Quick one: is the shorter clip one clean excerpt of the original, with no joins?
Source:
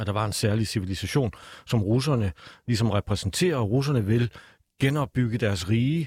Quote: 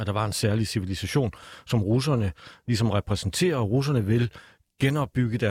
yes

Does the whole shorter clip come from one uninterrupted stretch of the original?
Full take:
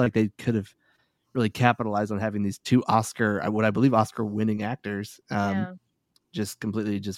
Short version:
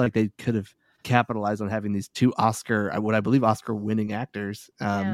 no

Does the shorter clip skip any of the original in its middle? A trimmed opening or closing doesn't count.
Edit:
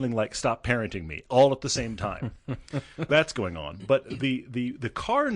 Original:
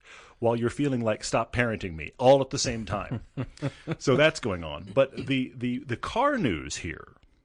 yes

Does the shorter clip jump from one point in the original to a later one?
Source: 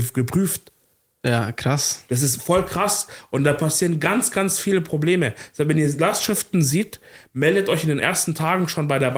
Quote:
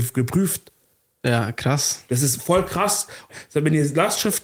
yes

